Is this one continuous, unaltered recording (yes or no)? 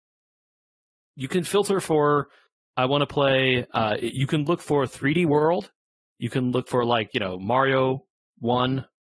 yes